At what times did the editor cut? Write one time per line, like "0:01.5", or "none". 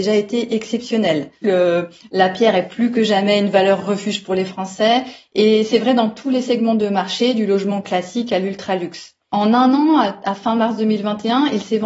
0:01.4